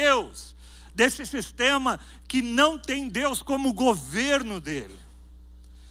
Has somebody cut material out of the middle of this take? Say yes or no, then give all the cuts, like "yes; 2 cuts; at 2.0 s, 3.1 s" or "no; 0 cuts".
no; 0 cuts